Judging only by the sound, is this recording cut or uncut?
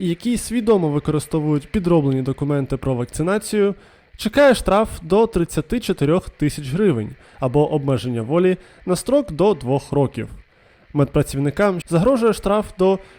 cut